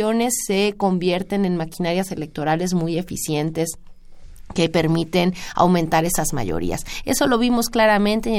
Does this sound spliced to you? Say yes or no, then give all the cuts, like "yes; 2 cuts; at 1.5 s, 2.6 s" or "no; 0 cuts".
no; 0 cuts